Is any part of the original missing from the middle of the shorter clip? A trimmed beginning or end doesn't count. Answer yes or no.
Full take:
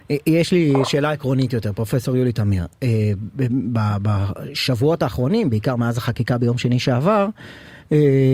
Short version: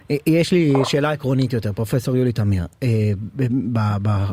no